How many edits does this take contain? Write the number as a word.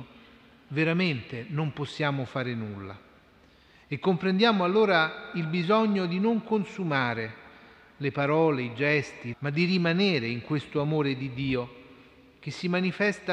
one